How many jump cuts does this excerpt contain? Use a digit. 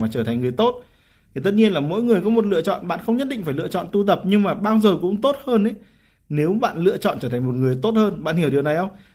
0